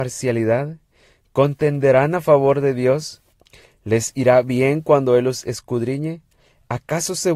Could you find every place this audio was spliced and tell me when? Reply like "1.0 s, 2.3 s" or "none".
none